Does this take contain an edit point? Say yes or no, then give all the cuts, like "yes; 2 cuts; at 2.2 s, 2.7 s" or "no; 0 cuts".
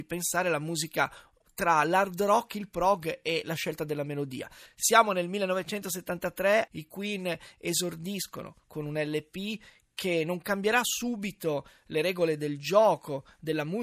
yes; 2 cuts; at 4.7 s, 6.7 s